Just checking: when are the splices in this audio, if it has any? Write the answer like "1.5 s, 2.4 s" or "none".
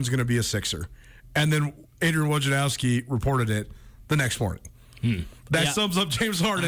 none